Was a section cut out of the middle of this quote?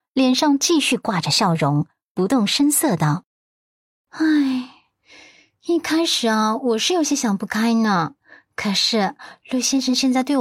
no; 0 cuts

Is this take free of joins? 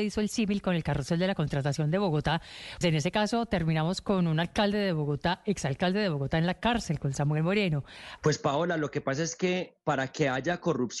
no; 2 cuts; at 2.8 s, 8.2 s

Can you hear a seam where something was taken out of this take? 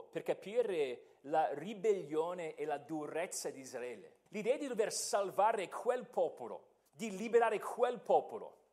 yes; 2 cuts; at 4.3 s, 6.9 s

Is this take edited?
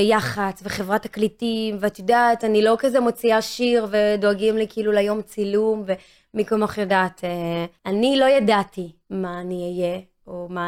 yes; 2 cuts; at 7.8 s, 9.0 s

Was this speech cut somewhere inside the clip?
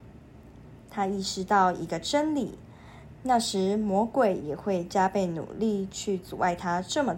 yes; 1 cut; at 3.1 s

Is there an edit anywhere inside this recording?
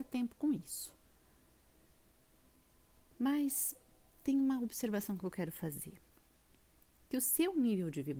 no; 0 cuts

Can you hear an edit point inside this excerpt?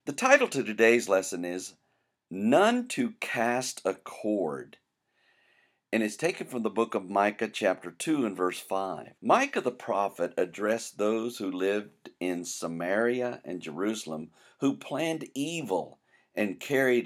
yes; 1 cut; at 9.2 s

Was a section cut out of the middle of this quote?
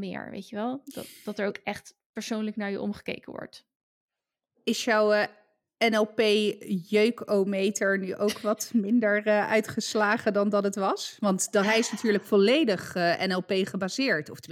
no; 0 cuts

